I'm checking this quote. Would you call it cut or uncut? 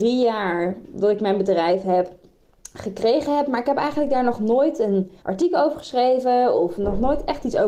cut